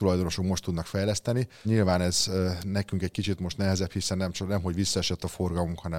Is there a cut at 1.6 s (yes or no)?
yes